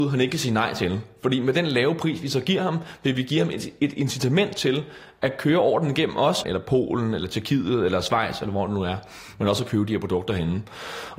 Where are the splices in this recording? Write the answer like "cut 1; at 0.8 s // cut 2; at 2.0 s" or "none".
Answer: cut 1; at 6.4 s